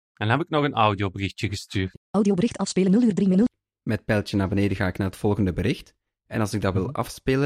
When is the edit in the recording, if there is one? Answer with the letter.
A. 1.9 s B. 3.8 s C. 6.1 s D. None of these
A